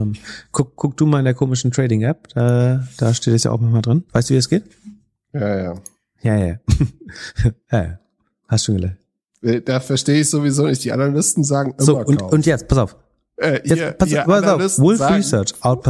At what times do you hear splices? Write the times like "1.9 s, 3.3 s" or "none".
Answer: 4.1 s